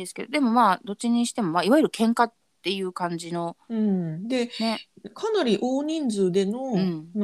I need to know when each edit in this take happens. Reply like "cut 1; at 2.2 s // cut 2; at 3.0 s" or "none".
none